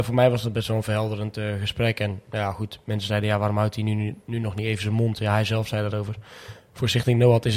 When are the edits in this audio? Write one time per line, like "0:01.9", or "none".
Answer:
none